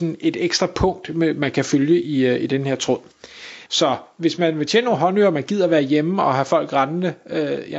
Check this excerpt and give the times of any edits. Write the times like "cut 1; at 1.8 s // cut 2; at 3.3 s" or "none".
cut 1; at 3.7 s